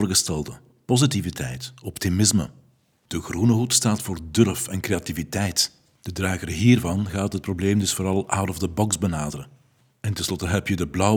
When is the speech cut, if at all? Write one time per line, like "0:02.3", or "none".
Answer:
none